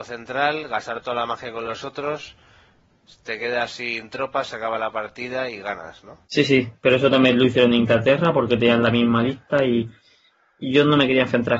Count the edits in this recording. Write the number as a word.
one